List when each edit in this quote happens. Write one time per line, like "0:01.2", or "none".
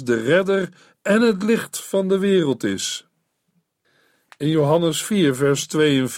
none